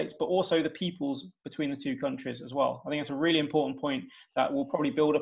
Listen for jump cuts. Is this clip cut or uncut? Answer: uncut